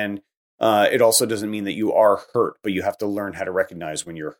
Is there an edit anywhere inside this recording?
no; 0 cuts

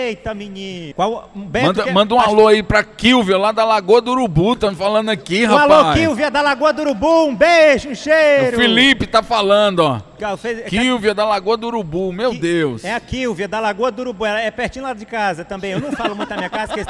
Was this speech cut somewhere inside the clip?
yes; 1 cut; at 0.9 s

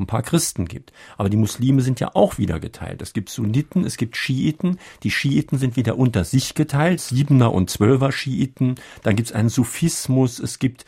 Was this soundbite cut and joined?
yes; 1 cut; at 7.0 s

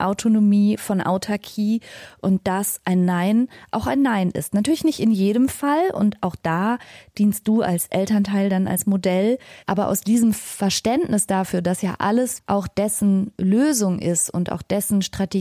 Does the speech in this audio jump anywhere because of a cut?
yes; 2 cuts; at 9.6 s, 12.4 s

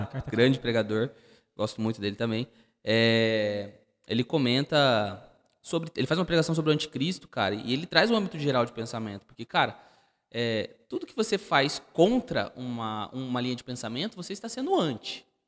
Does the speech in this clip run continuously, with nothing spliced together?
yes; 0 cuts

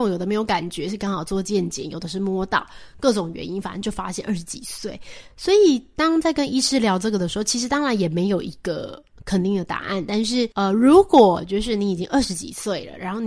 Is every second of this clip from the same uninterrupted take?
no; 1 cut; at 10.5 s

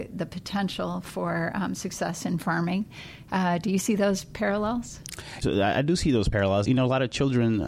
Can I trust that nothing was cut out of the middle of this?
no; 2 cuts; at 5.4 s, 6.6 s

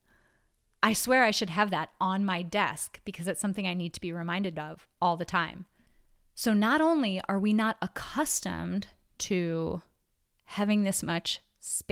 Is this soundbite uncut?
yes; 0 cuts

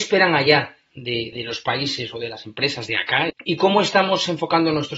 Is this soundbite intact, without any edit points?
no; 2 cuts; at 1.3 s, 3.3 s

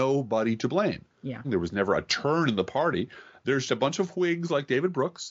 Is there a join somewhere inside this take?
yes; 2 cuts; at 1.4 s, 3.7 s

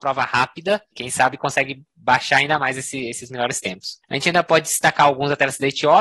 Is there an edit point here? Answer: no; 0 cuts

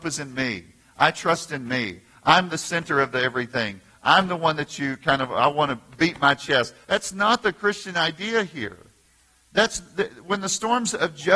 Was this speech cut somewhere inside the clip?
yes; 1 cut; at 6.8 s

